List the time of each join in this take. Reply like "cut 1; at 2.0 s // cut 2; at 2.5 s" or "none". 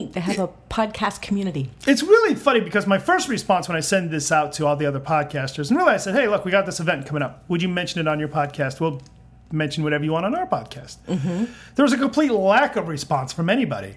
none